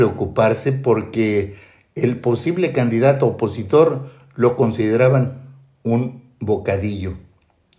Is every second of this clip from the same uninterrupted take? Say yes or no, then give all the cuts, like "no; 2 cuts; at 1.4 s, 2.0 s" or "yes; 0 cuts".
yes; 0 cuts